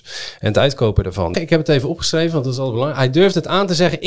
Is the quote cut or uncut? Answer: cut